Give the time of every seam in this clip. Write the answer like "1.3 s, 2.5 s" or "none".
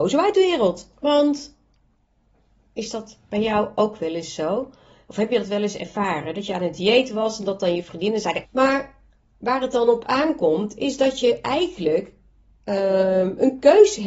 0.9 s, 8.4 s